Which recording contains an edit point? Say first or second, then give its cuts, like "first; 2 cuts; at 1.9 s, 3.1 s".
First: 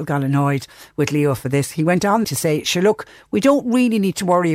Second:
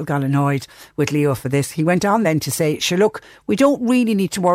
first; 1 cut; at 2.2 s